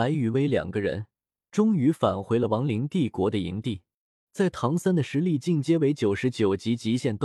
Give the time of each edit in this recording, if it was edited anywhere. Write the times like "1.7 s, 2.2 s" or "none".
4.3 s